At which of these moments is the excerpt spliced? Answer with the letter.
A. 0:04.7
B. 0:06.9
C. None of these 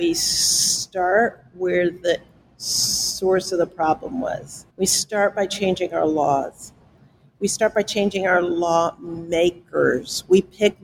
A